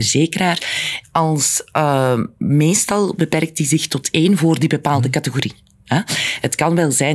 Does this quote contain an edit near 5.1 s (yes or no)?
no